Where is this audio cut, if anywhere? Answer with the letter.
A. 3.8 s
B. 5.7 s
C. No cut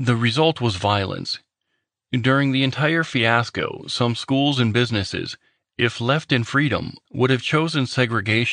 C